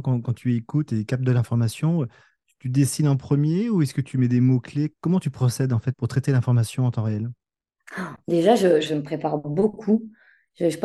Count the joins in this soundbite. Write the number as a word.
two